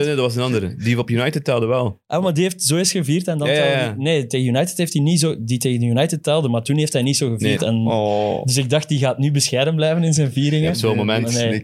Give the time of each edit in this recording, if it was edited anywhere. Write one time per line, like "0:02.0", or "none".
0:07.6